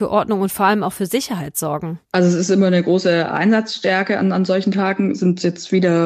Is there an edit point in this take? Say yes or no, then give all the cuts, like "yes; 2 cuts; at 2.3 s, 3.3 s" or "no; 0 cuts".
no; 0 cuts